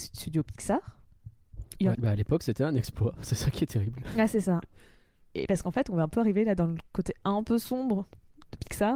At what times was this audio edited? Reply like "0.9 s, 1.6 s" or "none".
1.9 s